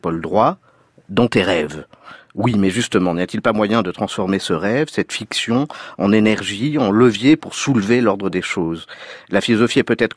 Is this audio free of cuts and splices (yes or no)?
yes